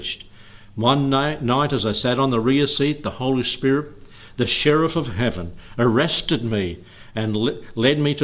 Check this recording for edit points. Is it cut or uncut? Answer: uncut